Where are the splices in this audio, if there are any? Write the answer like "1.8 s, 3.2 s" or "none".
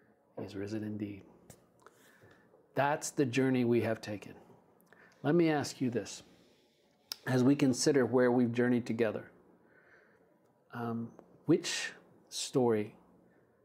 none